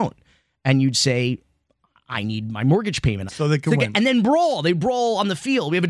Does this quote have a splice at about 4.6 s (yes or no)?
no